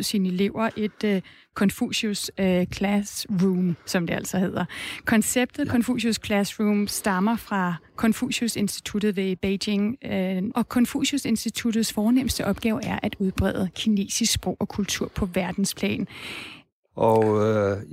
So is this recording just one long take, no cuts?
no; 2 cuts; at 10.5 s, 16.9 s

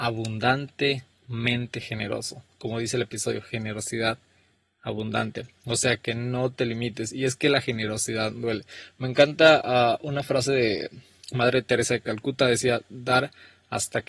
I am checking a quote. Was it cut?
no; 0 cuts

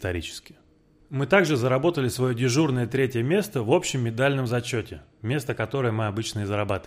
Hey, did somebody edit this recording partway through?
yes; 1 cut; at 1.0 s

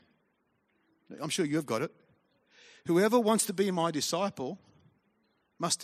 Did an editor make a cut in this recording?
no; 0 cuts

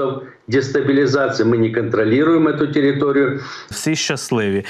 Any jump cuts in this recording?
yes; 1 cut; at 3.7 s

